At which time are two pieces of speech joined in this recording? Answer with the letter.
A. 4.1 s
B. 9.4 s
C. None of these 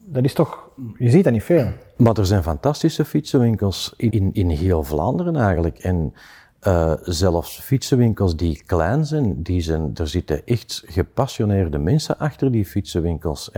A